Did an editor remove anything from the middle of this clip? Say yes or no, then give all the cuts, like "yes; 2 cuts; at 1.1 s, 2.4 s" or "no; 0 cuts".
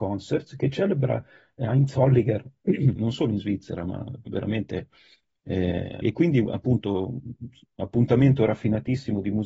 yes; 2 cuts; at 3.0 s, 6.0 s